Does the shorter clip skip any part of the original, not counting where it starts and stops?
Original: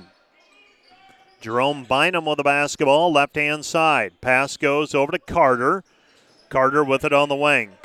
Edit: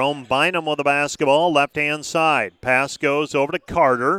no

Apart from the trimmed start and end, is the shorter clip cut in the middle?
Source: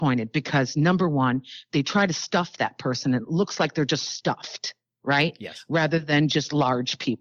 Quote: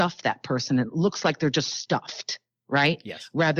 no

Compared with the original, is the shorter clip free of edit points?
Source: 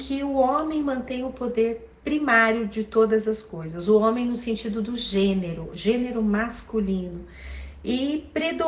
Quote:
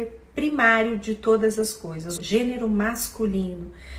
no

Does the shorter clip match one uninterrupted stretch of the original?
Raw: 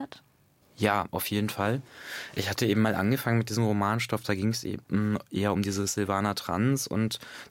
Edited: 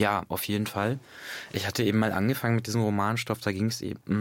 yes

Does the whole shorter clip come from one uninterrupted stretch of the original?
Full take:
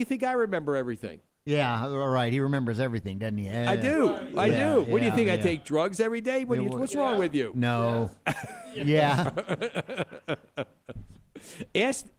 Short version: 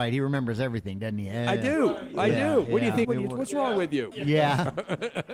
no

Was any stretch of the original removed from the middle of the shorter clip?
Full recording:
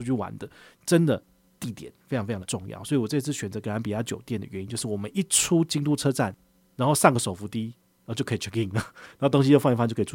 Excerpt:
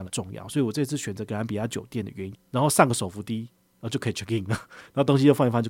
yes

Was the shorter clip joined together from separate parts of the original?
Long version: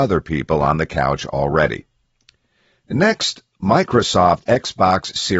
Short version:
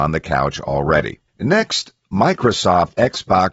yes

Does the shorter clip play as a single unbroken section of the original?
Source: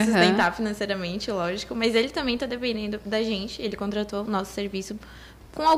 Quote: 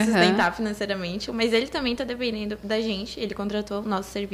no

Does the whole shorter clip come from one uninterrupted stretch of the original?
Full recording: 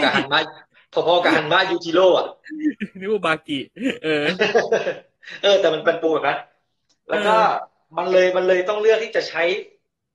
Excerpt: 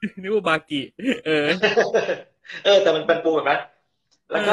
yes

